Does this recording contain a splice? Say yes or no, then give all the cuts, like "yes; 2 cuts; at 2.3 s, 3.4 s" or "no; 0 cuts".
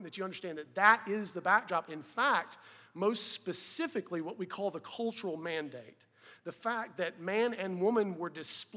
no; 0 cuts